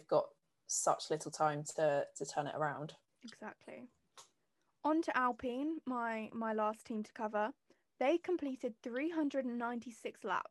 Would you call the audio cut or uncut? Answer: uncut